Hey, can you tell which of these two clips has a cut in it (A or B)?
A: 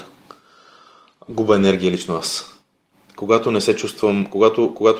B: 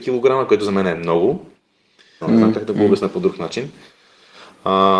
B